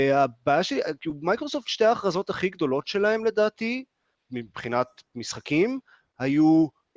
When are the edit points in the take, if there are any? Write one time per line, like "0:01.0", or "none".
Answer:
0:04.2